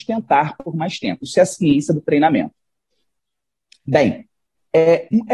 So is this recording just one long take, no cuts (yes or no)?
yes